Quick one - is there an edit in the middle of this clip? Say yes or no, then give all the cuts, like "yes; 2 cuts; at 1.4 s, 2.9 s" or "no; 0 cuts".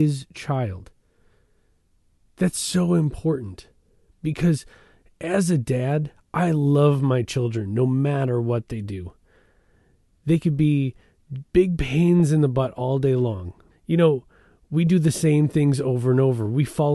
yes; 2 cuts; at 11.5 s, 13.7 s